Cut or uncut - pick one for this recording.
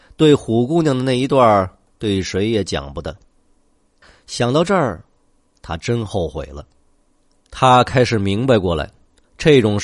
uncut